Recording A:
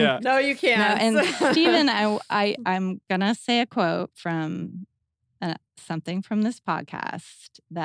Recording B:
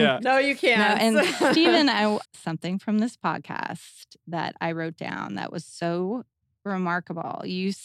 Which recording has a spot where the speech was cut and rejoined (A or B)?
B